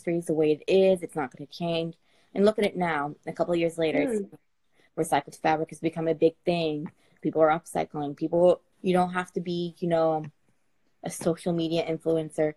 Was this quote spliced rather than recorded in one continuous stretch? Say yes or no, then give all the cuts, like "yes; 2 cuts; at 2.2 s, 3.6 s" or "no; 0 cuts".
yes; 2 cuts; at 7.2 s, 8.7 s